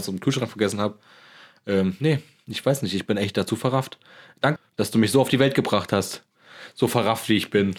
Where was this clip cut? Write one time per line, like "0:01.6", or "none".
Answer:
0:04.6